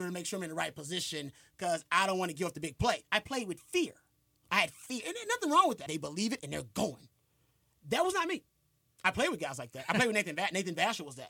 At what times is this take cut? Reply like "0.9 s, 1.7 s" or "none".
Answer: 5.9 s

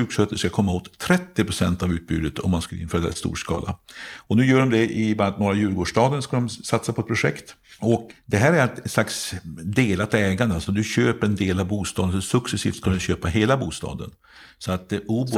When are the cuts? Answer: 8.1 s

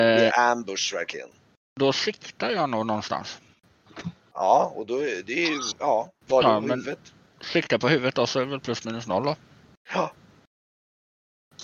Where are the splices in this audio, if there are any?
none

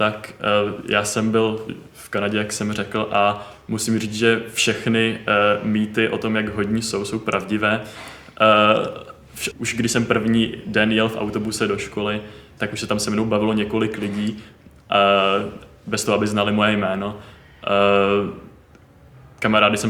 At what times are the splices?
9.5 s, 12.6 s

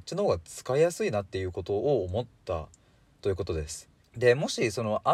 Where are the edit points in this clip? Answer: 4.0 s

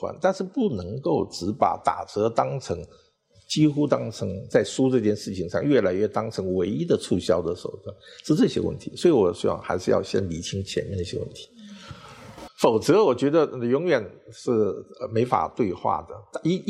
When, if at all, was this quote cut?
12.5 s

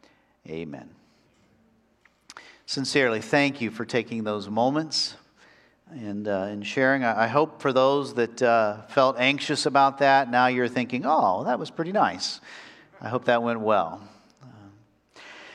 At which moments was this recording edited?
none

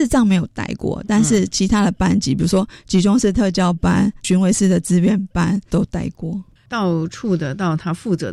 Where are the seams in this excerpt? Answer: 6.6 s

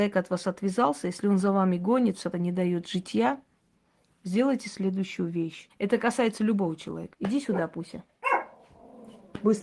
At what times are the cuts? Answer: 2.3 s, 5.7 s, 7.1 s

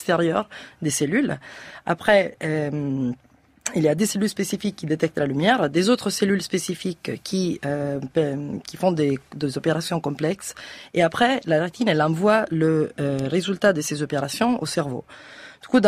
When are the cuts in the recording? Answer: none

